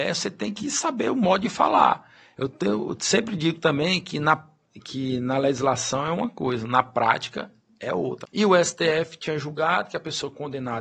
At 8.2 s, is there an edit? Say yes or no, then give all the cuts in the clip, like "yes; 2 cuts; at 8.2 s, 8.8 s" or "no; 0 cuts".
yes; 1 cut; at 8.2 s